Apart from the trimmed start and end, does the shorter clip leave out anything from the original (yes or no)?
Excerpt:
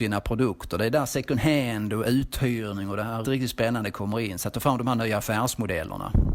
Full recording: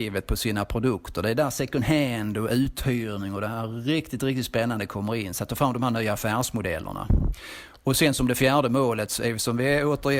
yes